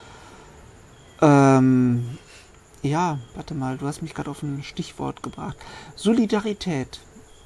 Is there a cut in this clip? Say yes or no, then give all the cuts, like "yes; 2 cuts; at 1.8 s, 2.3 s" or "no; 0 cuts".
no; 0 cuts